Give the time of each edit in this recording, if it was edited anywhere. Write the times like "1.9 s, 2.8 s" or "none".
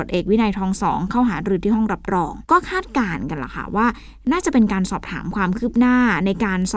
2.4 s